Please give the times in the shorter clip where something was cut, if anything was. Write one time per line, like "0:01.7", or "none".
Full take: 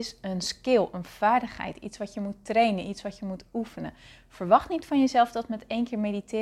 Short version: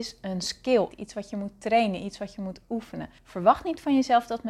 0:00.9
0:03.2